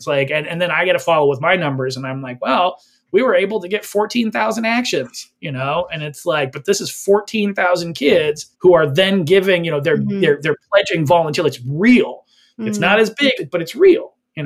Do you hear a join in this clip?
yes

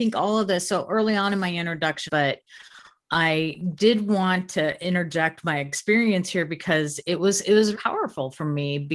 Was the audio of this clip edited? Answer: yes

